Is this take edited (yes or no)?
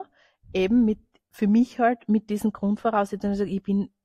no